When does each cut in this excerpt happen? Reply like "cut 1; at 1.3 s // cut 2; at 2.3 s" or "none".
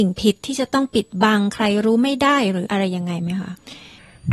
cut 1; at 2.6 s